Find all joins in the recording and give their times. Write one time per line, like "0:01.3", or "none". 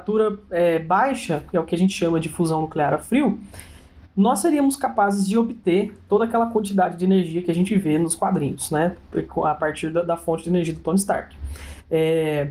none